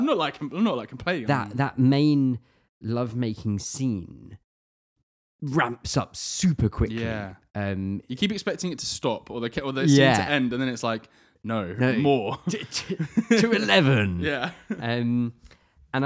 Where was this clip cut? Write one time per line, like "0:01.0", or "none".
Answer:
0:01.3